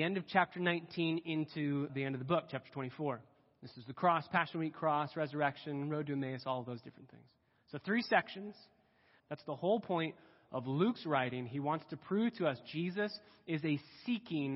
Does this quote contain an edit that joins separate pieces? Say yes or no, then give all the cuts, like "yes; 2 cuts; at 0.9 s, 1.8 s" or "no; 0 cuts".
yes; 2 cuts; at 1.9 s, 9.2 s